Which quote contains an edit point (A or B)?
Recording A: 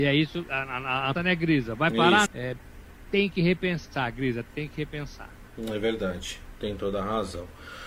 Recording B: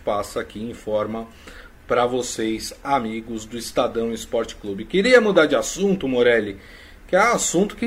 A